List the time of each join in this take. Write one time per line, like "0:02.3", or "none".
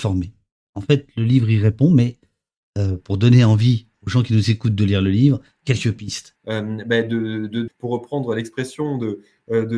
0:06.4
0:07.7